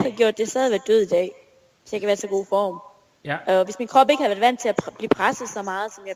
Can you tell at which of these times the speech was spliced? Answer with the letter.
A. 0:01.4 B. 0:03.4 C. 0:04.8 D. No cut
D